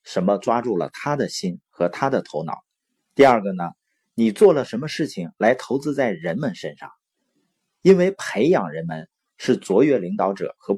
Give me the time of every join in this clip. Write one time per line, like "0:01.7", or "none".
0:03.0

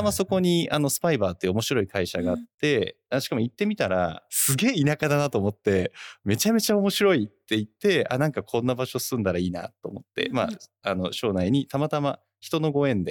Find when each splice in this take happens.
0:10.3

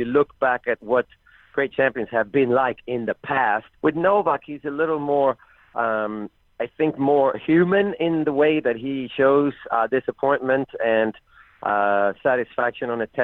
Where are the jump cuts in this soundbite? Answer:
0:03.7

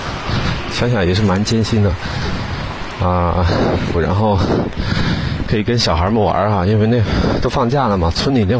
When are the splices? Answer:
0:03.9

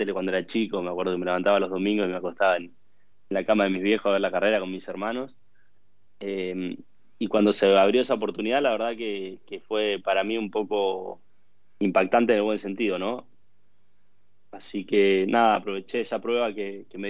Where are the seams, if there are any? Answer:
none

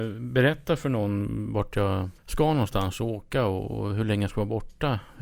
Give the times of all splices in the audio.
0:02.2

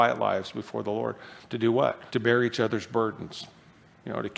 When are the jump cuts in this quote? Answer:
0:02.1

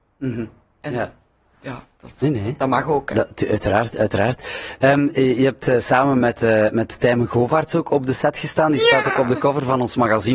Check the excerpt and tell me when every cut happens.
none

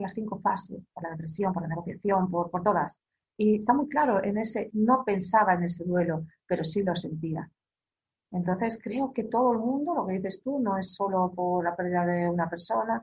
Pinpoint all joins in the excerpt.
0:04.7

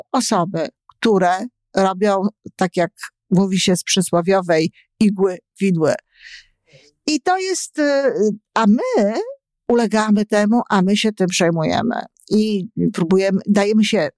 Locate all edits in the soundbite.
none

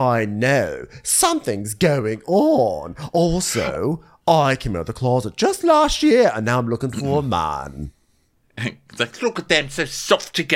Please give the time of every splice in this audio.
none

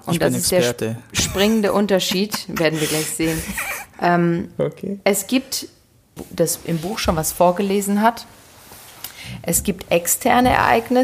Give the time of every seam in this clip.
0:06.2

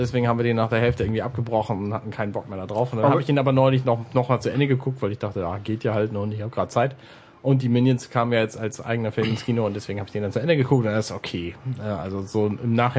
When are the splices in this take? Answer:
none

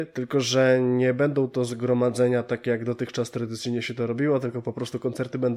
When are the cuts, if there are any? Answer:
none

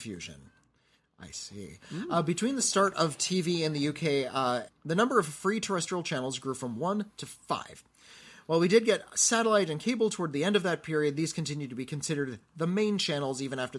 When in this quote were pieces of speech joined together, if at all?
0:04.7

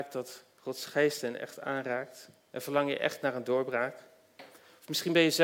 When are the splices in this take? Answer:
0:02.5

